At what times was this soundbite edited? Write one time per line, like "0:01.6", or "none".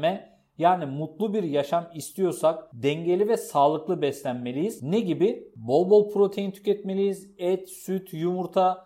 none